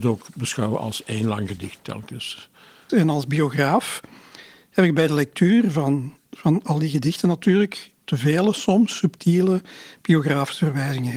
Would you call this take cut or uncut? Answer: cut